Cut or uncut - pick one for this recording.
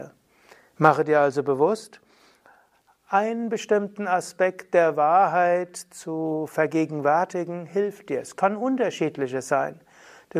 uncut